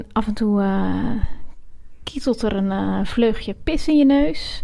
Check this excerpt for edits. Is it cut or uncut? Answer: uncut